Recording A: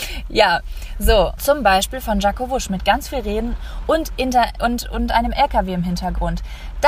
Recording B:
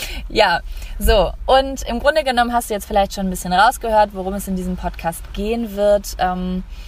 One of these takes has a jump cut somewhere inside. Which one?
A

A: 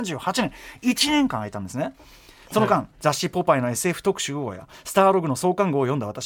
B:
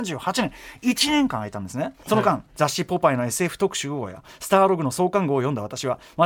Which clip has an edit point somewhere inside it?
B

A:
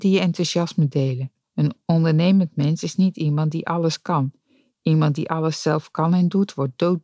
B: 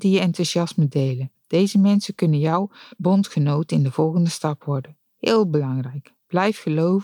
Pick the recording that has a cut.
A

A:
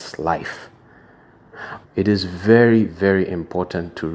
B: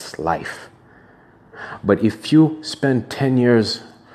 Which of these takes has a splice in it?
A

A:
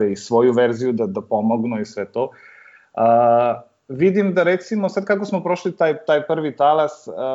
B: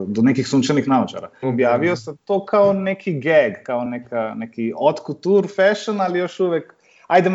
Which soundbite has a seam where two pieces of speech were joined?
B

